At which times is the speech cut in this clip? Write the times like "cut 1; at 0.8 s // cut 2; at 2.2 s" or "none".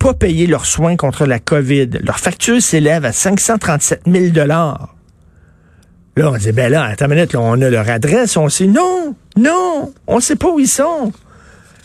cut 1; at 9.2 s